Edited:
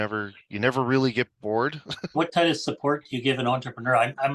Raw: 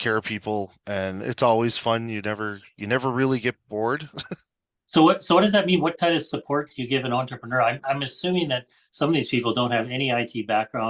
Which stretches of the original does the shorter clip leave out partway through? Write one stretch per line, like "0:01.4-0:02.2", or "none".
0:04.4-0:05.8